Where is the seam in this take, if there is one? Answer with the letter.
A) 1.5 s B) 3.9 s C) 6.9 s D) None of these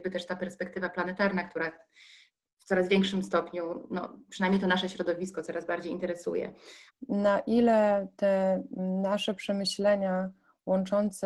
C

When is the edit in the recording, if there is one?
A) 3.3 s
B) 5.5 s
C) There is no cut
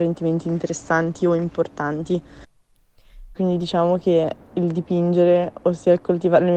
A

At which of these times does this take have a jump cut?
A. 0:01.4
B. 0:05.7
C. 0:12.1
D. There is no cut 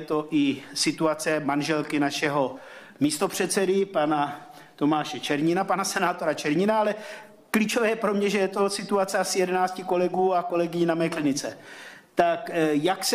D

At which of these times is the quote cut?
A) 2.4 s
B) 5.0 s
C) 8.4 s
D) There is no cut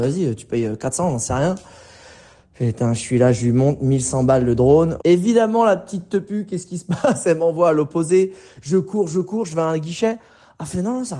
B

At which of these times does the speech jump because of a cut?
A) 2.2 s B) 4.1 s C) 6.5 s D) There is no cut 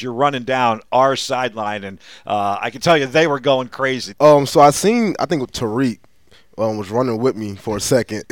B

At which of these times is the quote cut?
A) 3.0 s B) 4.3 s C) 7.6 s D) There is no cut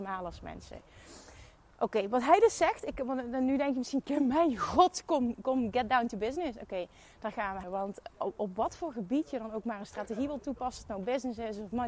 C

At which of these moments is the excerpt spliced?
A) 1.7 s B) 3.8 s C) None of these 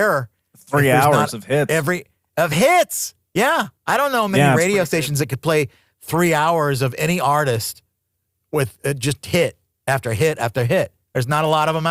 B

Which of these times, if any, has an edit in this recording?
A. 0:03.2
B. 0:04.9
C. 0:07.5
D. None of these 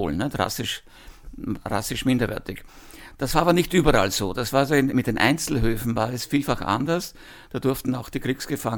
B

